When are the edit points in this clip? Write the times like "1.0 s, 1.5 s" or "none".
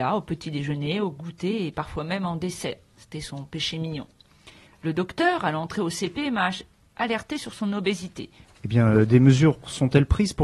4.7 s, 8.4 s